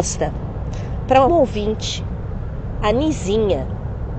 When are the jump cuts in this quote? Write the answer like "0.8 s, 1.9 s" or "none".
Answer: 1.3 s